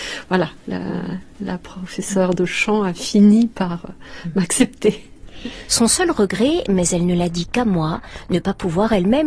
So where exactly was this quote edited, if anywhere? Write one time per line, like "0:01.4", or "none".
0:05.7

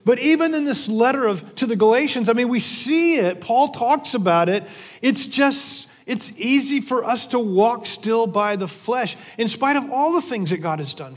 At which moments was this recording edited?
none

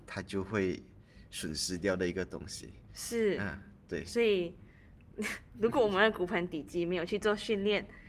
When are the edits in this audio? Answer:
none

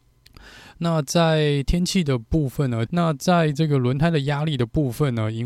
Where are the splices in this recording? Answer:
0:02.9

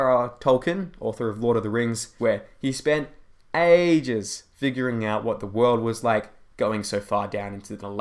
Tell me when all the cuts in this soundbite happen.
0:02.2

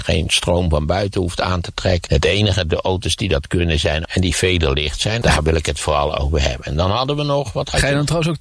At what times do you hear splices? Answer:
0:02.1
0:04.0
0:05.2

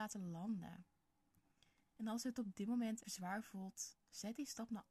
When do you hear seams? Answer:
0:03.0

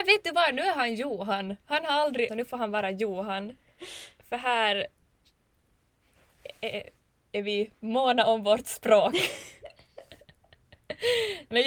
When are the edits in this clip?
0:02.3

